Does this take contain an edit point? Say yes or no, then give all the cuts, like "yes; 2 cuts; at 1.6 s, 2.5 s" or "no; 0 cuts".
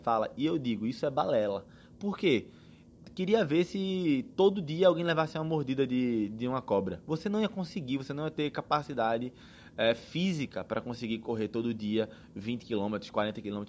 no; 0 cuts